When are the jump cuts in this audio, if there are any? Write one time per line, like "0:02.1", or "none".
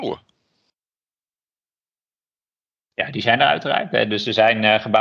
none